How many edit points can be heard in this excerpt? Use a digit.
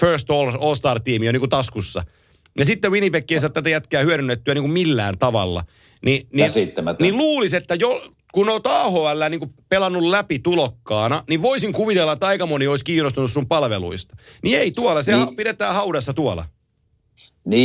0